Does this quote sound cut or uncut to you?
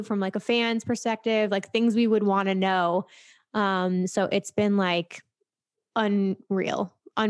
uncut